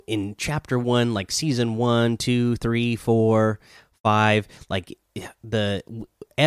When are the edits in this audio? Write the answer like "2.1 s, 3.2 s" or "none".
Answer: none